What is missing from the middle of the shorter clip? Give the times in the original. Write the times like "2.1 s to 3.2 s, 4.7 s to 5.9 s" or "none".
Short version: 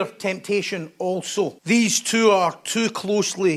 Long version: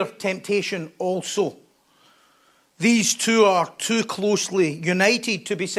1.6 s to 2.7 s